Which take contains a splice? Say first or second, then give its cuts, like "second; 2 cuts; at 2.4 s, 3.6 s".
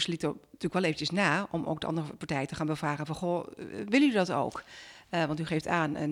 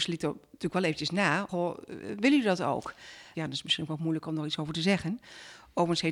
second; 2 cuts; at 1.5 s, 3.3 s